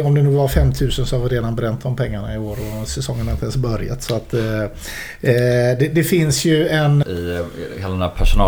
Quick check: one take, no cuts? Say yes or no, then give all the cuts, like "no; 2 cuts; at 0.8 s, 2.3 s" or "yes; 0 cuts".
no; 1 cut; at 7.0 s